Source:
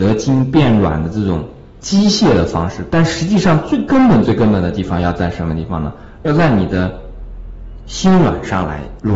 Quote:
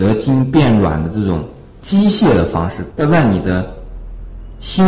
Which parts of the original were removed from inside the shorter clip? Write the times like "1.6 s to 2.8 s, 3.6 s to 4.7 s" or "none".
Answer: 2.9 s to 6.2 s